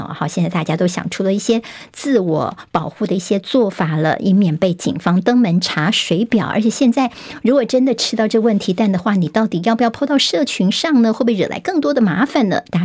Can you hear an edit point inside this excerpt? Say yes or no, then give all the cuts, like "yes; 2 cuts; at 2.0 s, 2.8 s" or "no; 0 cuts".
no; 0 cuts